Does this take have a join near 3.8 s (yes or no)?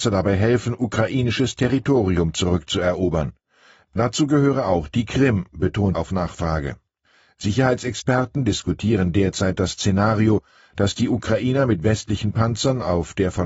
no